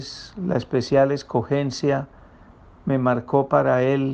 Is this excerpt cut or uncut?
uncut